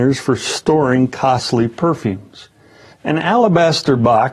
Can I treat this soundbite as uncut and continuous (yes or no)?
no